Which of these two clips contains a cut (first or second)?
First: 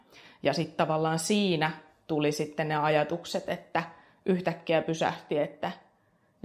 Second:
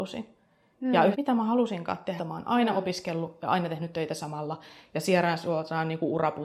second